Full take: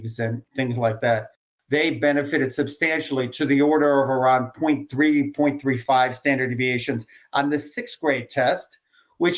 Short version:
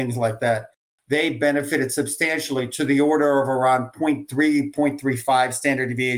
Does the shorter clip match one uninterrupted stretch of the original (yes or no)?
yes